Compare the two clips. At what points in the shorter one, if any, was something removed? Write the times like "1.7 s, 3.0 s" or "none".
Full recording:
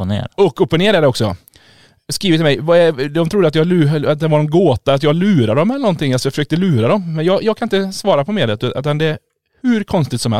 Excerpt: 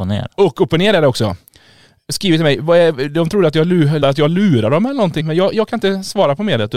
4.0 s, 5.2 s